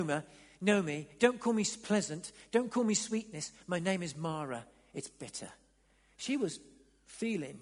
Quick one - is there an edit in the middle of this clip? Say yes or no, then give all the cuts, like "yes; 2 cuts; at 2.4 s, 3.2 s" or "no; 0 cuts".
no; 0 cuts